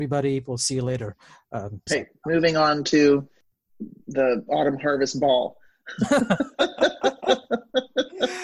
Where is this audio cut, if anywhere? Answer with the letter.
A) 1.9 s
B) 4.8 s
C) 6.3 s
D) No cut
A